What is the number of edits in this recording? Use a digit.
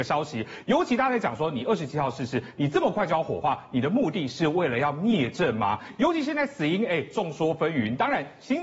0